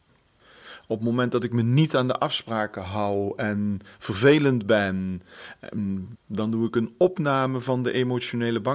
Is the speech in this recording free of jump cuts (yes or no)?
no